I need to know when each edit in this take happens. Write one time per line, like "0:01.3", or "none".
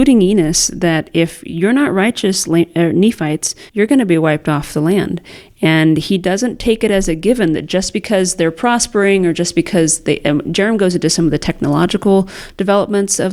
0:03.7